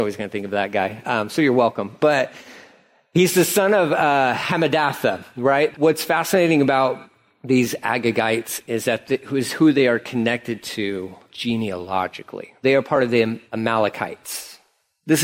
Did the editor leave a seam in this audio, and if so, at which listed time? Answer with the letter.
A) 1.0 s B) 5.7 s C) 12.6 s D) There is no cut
B